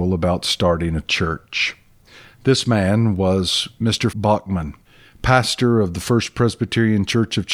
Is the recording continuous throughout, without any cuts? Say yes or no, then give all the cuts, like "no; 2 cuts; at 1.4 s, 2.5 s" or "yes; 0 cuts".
no; 1 cut; at 4.1 s